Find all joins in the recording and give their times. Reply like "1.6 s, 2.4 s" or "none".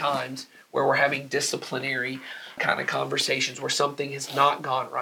2.6 s

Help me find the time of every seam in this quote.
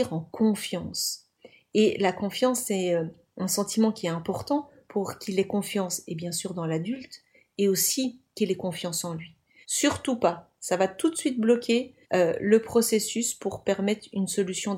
9.6 s, 12.0 s

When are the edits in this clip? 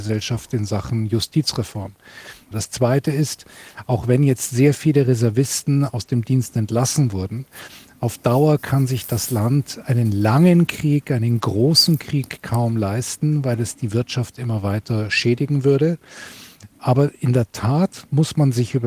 2.5 s

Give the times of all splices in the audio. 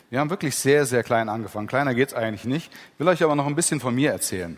none

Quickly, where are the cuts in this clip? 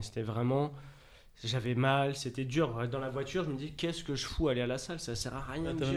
none

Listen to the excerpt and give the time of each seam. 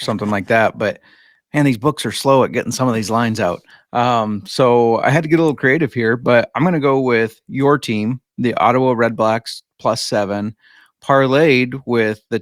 none

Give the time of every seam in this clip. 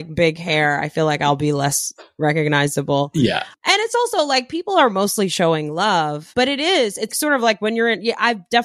7.1 s

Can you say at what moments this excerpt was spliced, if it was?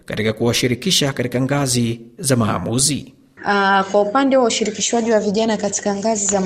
3.4 s

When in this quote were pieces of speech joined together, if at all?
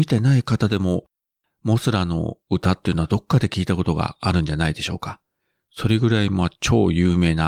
none

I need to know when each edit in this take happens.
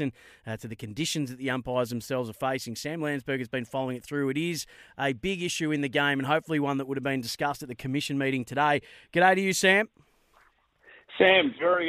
none

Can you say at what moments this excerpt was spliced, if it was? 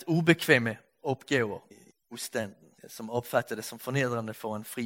1.7 s, 2.8 s

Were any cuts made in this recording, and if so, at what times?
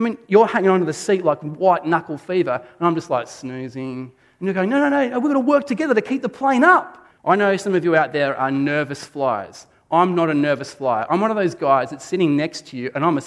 7.1 s

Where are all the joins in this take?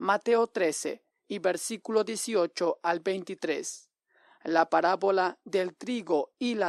1.1 s

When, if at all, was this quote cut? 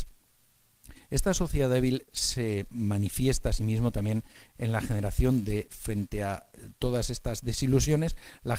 5.7 s

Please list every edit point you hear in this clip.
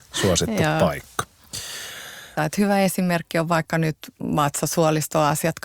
2.4 s

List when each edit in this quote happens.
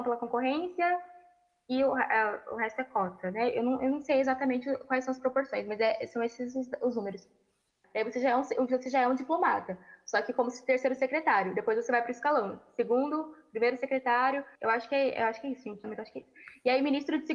7.8 s, 14.6 s, 15.8 s

